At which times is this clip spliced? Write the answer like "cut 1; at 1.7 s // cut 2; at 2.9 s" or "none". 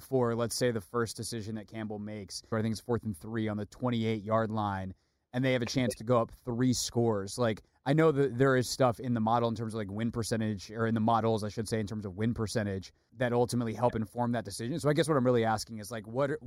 cut 1; at 2.5 s // cut 2; at 13.1 s